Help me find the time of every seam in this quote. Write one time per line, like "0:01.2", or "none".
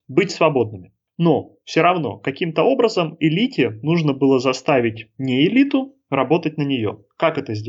none